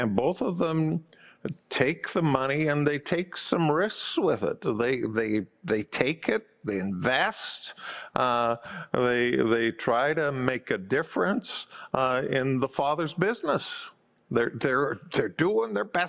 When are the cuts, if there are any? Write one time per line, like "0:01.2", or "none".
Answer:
none